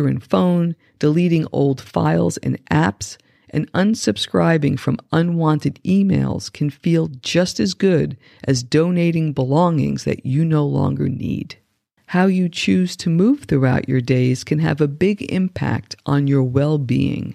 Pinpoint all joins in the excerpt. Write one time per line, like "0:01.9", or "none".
0:12.0